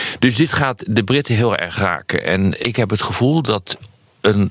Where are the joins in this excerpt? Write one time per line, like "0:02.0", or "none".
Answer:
0:02.6